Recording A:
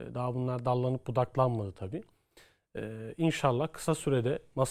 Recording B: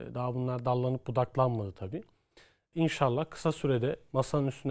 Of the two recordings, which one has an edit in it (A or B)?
B